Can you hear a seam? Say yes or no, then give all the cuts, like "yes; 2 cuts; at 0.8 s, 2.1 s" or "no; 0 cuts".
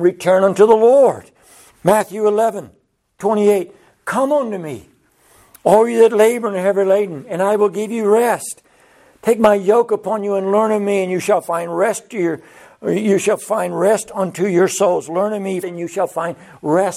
yes; 2 cuts; at 1.7 s, 15.6 s